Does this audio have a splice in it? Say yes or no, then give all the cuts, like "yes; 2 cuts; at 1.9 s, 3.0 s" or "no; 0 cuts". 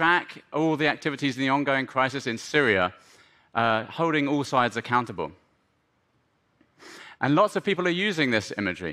yes; 1 cut; at 7.2 s